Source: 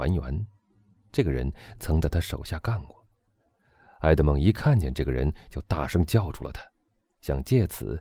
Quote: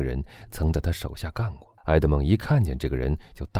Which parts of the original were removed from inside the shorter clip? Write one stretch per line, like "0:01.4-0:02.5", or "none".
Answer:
0:03.1-0:03.9